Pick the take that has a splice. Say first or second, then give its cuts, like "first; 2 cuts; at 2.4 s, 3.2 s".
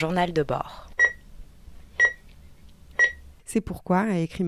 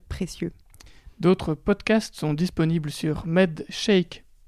first; 1 cut; at 3.4 s